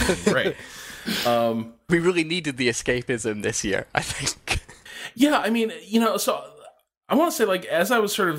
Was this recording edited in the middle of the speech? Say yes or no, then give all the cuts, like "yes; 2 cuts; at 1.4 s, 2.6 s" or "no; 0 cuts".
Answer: no; 0 cuts